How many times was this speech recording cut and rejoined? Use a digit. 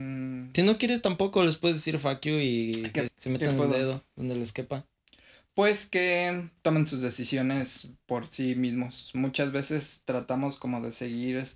1